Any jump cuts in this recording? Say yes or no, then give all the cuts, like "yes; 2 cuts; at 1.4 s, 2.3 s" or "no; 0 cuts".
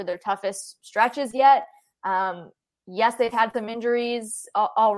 no; 0 cuts